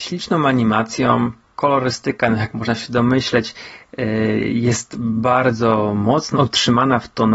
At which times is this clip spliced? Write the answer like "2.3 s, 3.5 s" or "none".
6.3 s